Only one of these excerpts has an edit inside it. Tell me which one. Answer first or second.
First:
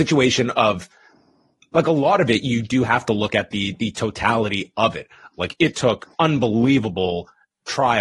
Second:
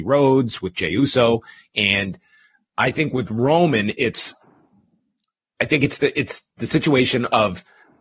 first